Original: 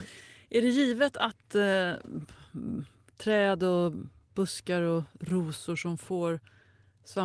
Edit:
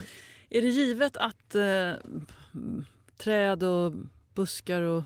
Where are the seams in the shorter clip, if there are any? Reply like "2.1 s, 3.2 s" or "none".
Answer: none